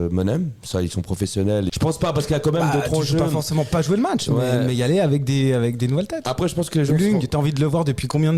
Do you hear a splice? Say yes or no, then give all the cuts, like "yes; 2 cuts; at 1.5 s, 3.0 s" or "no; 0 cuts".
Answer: yes; 1 cut; at 1.7 s